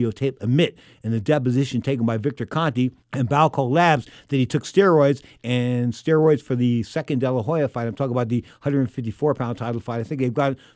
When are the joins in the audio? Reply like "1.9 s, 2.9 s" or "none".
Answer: 3.0 s